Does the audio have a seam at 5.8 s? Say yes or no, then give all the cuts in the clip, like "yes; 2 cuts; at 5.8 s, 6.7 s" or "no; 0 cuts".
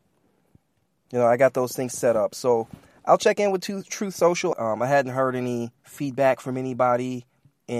yes; 2 cuts; at 4.5 s, 5.8 s